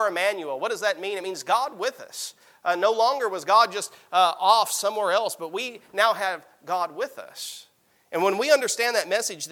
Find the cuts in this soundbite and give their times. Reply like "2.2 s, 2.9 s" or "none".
none